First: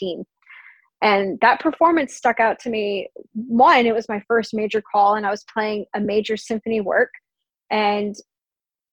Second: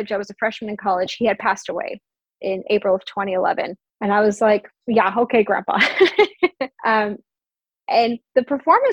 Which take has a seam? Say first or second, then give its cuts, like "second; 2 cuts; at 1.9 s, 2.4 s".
second; 2 cuts; at 3.9 s, 6.8 s